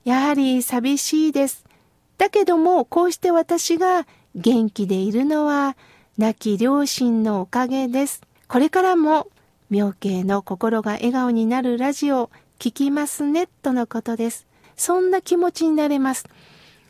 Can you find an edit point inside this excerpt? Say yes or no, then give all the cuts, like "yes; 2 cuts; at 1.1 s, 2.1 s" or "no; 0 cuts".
yes; 2 cuts; at 8.4 s, 14.6 s